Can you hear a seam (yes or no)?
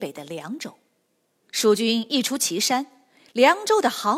yes